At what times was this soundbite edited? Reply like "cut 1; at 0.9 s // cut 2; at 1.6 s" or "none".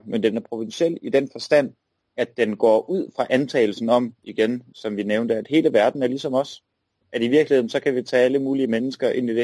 none